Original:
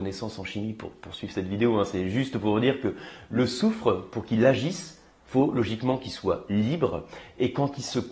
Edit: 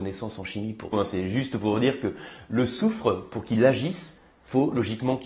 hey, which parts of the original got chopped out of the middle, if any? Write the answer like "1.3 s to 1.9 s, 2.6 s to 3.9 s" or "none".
0.9 s to 1.7 s